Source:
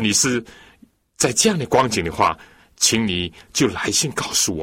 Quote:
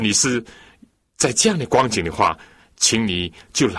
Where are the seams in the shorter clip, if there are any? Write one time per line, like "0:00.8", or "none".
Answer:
none